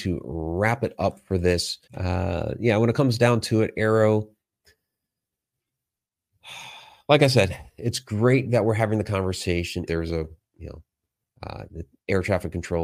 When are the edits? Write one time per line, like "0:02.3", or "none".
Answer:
0:01.9
0:09.9